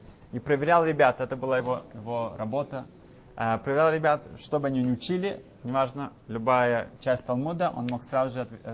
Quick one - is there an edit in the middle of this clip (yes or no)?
no